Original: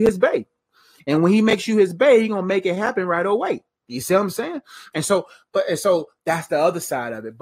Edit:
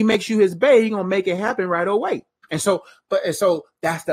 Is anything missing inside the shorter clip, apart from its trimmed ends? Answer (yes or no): yes